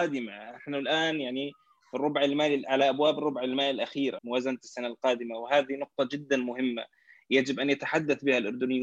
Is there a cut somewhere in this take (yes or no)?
yes